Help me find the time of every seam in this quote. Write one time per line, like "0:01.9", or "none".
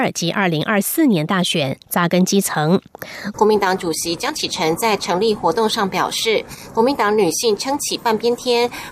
0:03.3